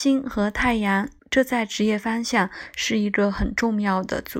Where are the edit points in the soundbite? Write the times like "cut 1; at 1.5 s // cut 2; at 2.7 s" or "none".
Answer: cut 1; at 1.2 s